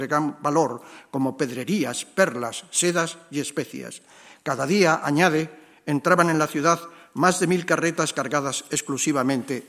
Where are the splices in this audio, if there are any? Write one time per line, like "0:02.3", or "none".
none